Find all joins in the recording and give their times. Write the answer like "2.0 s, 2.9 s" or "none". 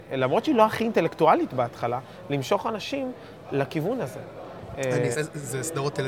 5.1 s